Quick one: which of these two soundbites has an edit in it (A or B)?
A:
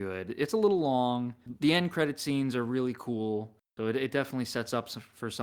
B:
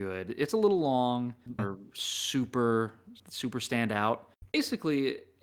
B